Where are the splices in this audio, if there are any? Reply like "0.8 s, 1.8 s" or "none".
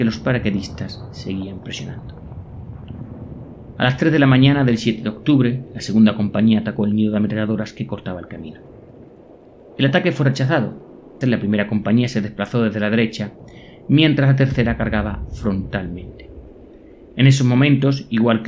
11.2 s